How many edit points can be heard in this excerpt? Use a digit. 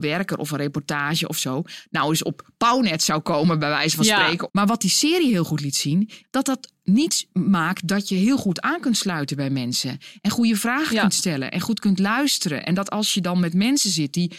2